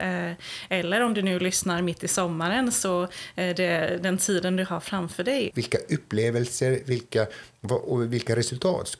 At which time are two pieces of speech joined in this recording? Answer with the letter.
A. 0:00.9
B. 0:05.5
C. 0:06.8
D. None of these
B